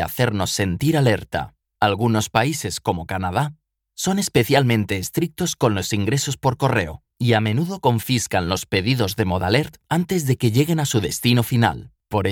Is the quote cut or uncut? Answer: cut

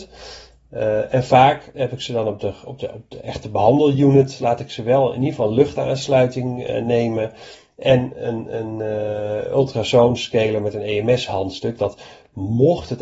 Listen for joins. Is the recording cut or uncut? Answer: uncut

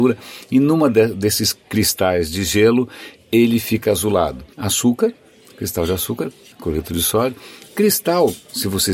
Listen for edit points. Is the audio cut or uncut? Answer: cut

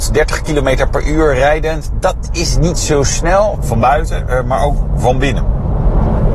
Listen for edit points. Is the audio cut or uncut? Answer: cut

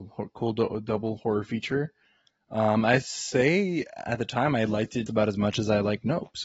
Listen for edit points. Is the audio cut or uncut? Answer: cut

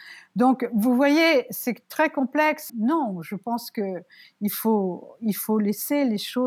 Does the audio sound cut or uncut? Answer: cut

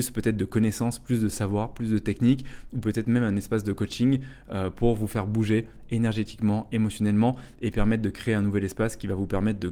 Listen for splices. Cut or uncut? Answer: uncut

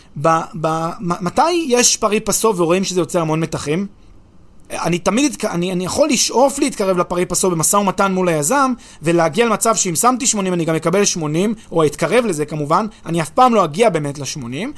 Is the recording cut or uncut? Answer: cut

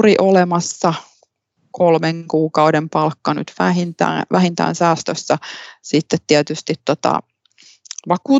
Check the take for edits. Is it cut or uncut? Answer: uncut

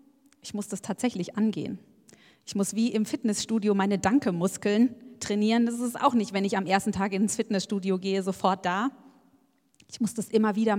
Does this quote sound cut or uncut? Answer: uncut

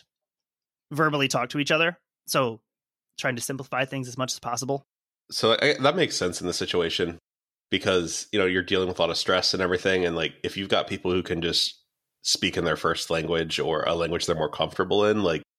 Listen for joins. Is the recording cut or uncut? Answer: cut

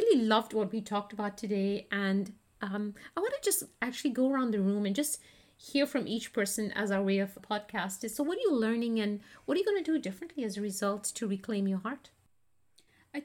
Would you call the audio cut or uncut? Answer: cut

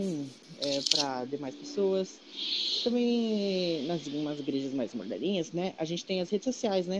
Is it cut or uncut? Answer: uncut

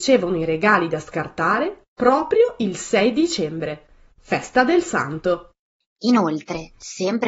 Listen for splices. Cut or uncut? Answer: cut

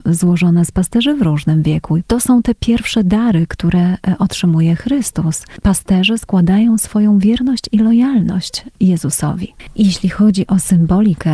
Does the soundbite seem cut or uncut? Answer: cut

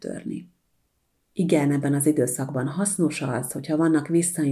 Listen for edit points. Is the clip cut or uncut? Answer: cut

